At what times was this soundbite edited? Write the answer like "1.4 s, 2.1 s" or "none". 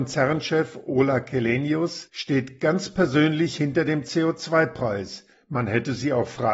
5.3 s